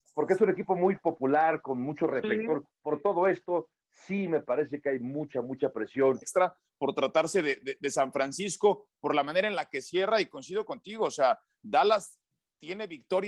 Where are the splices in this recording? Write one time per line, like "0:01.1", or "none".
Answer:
0:06.2